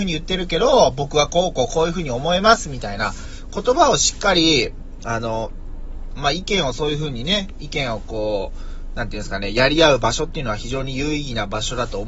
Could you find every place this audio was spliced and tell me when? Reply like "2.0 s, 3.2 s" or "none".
6.2 s